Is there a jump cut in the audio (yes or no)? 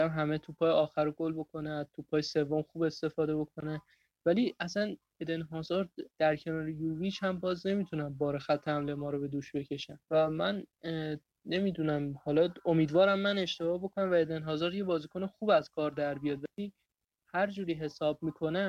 yes